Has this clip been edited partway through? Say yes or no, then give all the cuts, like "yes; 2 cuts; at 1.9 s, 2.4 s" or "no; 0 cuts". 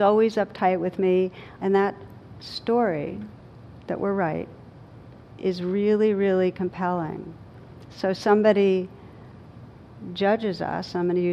yes; 1 cut; at 1.6 s